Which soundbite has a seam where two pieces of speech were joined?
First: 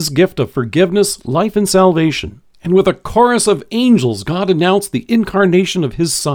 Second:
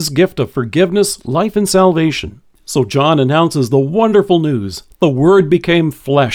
first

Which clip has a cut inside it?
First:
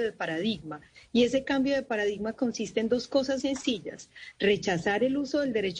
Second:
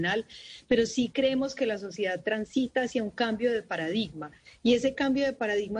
first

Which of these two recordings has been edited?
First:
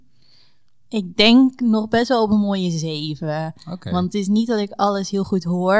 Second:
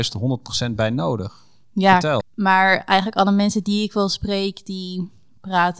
second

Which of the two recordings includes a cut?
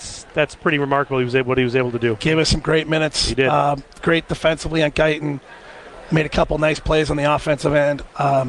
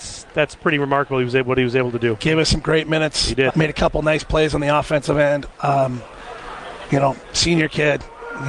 second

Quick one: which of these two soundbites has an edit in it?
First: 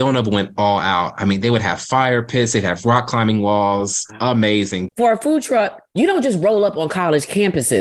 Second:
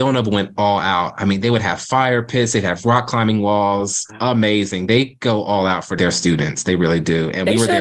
first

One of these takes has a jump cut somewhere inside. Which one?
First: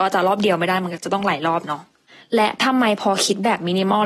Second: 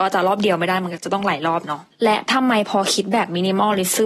second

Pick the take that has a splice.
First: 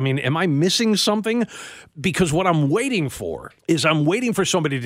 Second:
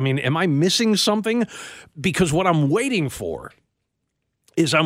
first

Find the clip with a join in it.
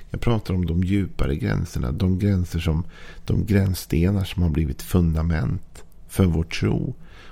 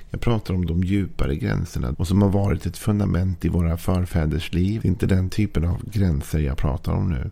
second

